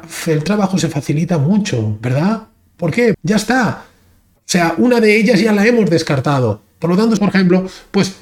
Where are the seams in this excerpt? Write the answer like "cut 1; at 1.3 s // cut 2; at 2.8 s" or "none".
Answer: cut 1; at 3.1 s // cut 2; at 7.2 s